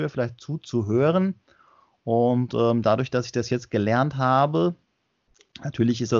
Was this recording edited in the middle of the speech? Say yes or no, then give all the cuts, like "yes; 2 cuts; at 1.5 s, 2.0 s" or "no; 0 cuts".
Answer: no; 0 cuts